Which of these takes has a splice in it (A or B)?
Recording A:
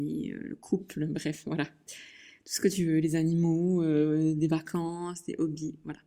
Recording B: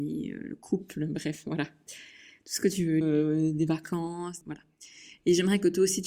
B